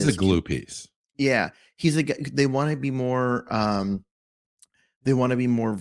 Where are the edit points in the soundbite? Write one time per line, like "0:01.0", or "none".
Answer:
none

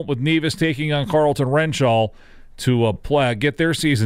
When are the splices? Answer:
none

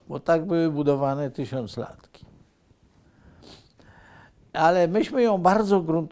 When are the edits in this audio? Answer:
none

